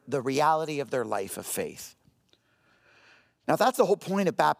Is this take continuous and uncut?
yes; 0 cuts

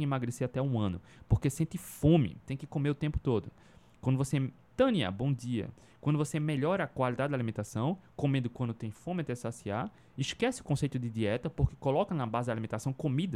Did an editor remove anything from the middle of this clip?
no; 0 cuts

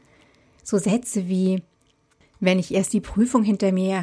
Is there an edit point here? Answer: no; 0 cuts

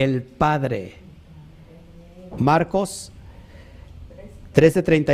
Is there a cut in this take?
yes; 1 cut; at 2.3 s

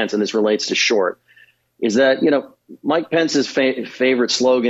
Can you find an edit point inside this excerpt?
no; 0 cuts

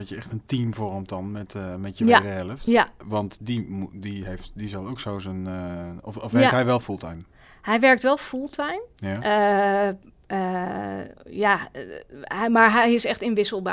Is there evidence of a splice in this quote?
no; 0 cuts

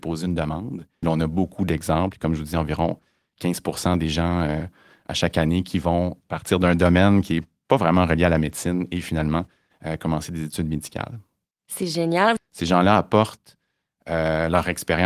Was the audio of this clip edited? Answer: yes; 2 cuts; at 1.0 s, 12.4 s

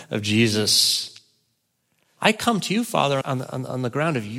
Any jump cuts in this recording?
yes; 2 cuts; at 2.2 s, 3.2 s

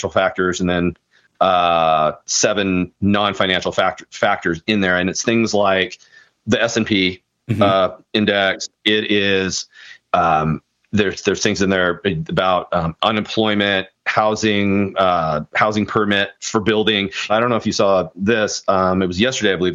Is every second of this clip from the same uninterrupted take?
no; 1 cut; at 17.3 s

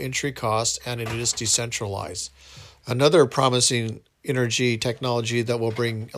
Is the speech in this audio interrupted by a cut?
yes; 1 cut; at 2.8 s

